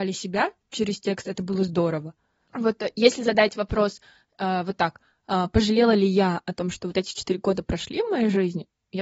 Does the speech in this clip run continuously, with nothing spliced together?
yes; 0 cuts

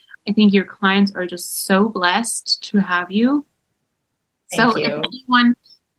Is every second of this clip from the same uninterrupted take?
yes; 0 cuts

